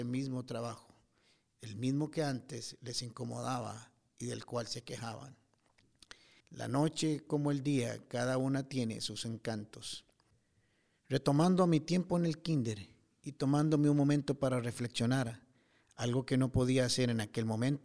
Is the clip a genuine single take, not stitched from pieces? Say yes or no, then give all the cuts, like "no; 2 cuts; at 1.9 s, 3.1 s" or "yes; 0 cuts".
no; 1 cut; at 6.4 s